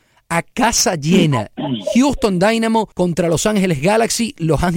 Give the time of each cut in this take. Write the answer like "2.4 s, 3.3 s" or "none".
2.9 s

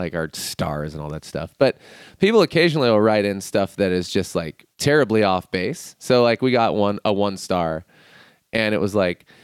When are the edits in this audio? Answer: 4.7 s

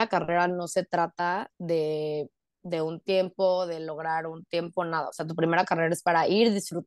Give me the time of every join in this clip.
1.5 s

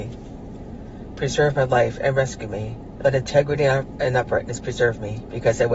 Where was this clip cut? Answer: 3.0 s

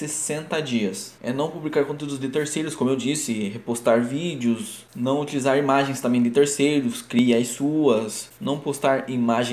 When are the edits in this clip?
1.2 s

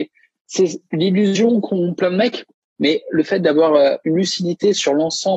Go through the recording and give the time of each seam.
2.8 s

